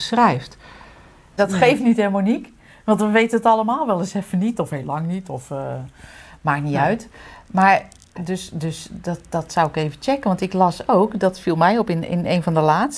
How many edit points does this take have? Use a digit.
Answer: 1